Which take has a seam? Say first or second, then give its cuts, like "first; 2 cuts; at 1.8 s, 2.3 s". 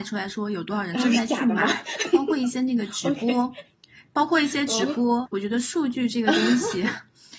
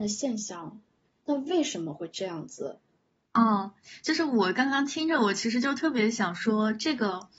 first; 1 cut; at 5.3 s